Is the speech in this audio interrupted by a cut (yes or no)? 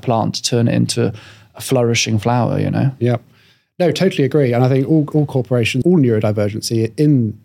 yes